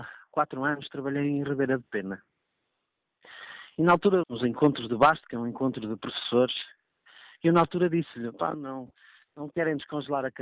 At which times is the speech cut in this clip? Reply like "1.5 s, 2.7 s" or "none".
4.2 s, 8.5 s